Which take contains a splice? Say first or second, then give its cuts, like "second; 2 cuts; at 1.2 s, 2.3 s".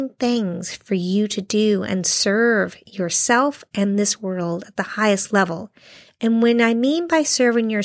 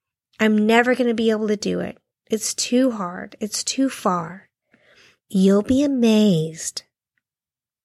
second; 1 cut; at 5.2 s